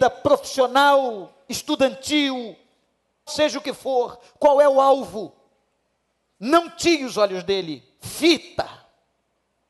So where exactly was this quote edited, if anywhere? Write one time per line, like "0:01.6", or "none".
0:03.3
0:06.3